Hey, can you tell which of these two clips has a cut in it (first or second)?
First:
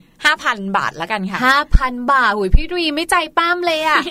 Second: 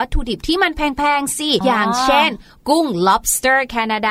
second